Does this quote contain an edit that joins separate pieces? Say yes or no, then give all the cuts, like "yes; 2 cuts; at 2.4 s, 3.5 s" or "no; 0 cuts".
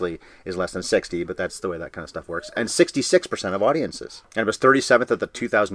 no; 0 cuts